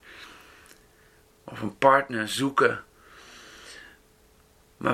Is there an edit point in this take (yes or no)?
no